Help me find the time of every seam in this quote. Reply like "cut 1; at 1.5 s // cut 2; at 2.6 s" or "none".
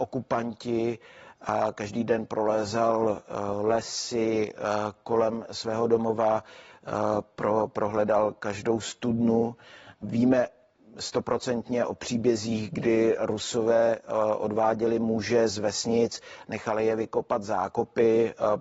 cut 1; at 10.0 s